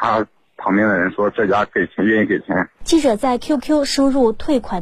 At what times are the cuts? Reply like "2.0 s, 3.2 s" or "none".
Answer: 2.8 s